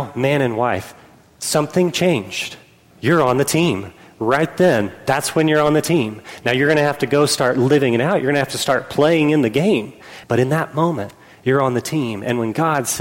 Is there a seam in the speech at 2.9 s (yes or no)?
yes